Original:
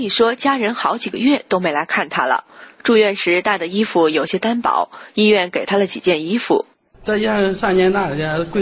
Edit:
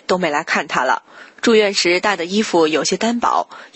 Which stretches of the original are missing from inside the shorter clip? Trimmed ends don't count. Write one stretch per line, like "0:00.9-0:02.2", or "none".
none